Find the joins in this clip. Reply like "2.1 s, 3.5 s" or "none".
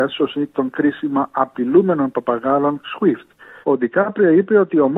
3.6 s